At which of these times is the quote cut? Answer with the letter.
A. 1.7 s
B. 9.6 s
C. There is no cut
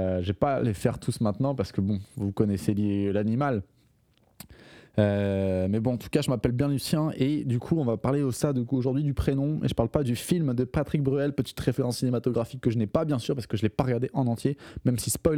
C